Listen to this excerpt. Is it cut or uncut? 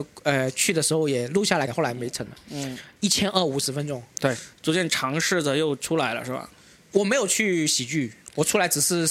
cut